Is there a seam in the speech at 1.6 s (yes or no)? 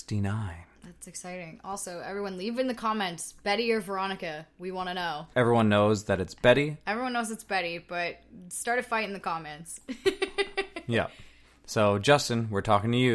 no